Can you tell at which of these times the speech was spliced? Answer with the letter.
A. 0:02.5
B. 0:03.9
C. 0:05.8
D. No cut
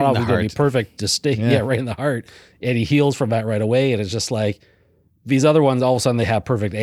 D